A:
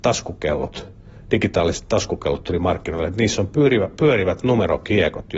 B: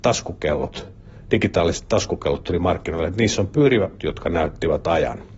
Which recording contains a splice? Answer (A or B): B